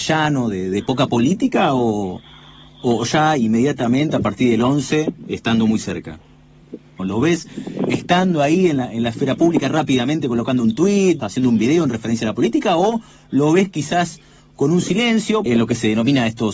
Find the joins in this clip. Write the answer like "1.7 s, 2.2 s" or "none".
7.0 s, 11.2 s, 15.5 s